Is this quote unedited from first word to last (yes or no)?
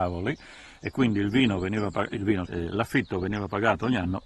no